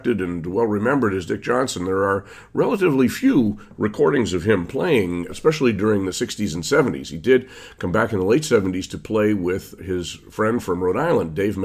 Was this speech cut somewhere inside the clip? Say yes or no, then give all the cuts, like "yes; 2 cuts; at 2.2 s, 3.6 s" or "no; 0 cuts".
yes; 2 cuts; at 5.3 s, 9.8 s